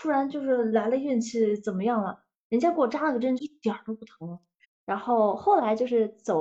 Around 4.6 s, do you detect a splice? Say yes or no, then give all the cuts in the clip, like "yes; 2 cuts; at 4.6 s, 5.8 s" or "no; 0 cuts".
yes; 2 cuts; at 3.4 s, 4.6 s